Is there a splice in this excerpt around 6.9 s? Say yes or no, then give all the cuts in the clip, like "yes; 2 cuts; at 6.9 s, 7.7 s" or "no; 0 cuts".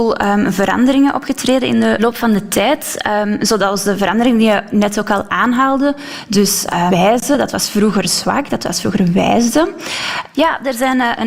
yes; 2 cuts; at 6.9 s, 10.3 s